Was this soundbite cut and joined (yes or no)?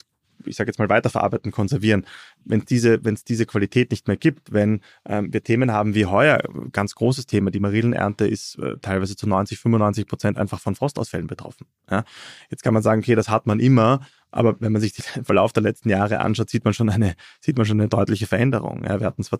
no